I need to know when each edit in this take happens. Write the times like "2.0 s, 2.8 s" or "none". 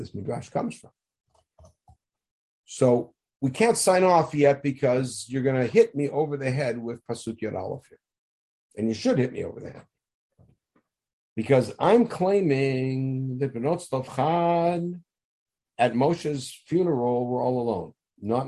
none